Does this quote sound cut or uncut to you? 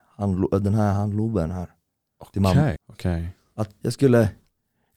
cut